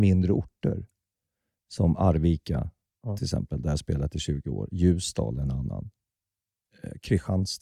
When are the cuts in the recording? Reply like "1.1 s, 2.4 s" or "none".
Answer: none